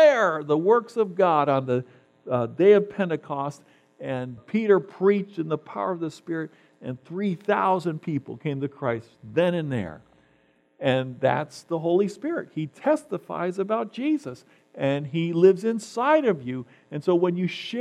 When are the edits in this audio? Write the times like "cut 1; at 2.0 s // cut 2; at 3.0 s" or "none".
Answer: cut 1; at 4.4 s